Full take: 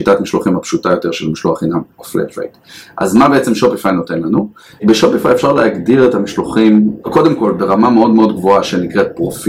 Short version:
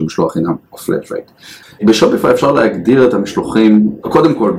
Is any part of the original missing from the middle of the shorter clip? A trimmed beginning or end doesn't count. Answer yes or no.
yes